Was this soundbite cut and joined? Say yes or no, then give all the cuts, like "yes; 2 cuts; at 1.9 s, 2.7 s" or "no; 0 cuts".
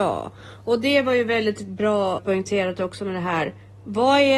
yes; 1 cut; at 2.2 s